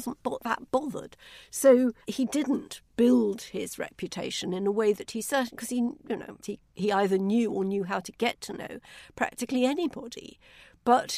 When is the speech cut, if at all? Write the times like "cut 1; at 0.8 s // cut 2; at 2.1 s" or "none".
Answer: cut 1; at 2.0 s // cut 2; at 6.4 s

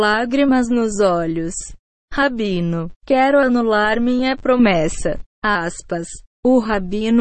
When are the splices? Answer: cut 1; at 3.0 s

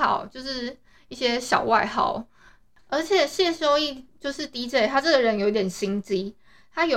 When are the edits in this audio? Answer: none

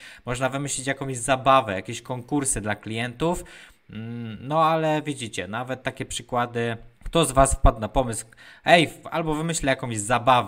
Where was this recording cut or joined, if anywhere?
cut 1; at 6.9 s // cut 2; at 9.0 s

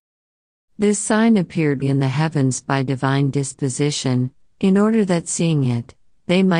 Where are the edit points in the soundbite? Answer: cut 1; at 1.8 s // cut 2; at 4.5 s

